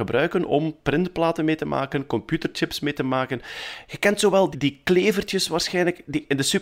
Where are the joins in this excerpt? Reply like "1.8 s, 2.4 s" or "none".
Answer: 4.5 s